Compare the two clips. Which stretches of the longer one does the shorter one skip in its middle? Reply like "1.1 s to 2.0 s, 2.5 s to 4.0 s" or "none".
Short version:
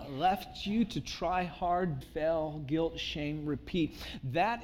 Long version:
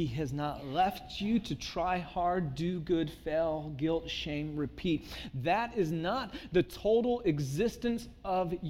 2.6 s to 3.1 s

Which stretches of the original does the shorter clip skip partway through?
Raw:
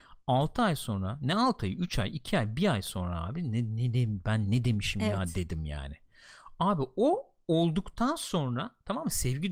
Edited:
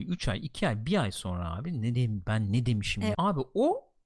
3.6 s to 3.9 s, 5.1 s to 6.6 s

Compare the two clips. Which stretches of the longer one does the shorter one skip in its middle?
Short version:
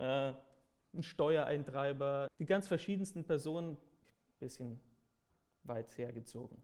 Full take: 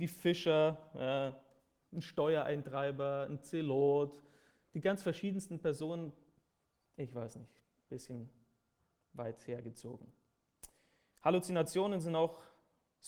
3.3 s to 4.6 s, 6.4 s to 7.5 s

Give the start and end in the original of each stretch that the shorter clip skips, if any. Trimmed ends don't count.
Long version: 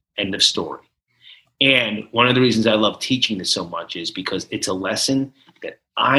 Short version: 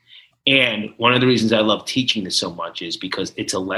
none

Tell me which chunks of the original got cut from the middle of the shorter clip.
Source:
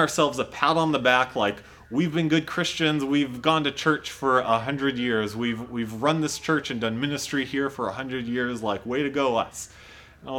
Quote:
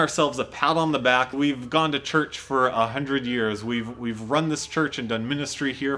1.3 s to 3.1 s

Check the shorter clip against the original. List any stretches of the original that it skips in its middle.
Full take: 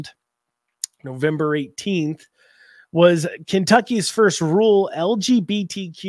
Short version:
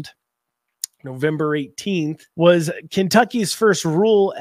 2.3 s to 2.9 s

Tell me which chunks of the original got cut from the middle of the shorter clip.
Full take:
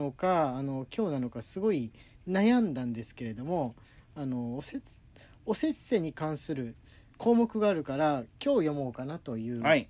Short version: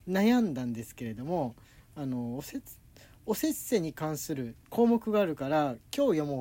6.8 s to 7.1 s

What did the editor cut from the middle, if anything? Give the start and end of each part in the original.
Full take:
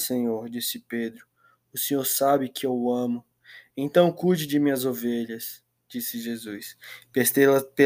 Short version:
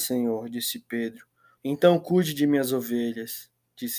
1.6 s to 3.7 s

